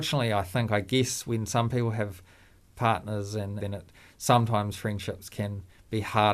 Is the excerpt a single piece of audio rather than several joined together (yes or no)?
no